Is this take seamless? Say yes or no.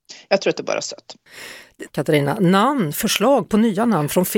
no